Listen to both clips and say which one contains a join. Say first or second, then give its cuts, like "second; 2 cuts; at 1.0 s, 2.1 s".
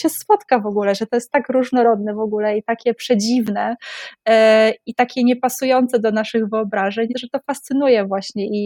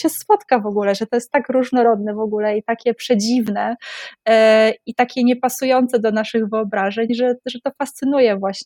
first; 1 cut; at 7.1 s